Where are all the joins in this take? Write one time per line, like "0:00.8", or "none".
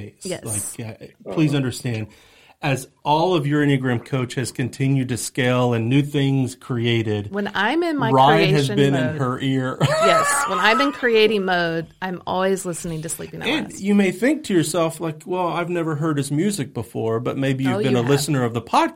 none